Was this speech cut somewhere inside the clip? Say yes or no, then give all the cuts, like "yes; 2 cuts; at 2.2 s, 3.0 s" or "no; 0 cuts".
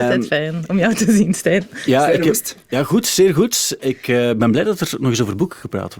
no; 0 cuts